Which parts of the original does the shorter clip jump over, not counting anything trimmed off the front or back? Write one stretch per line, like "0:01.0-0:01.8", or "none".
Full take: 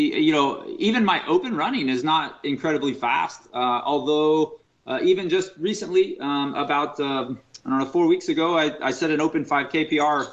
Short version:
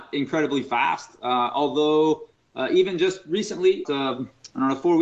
0:06.2-0:07.0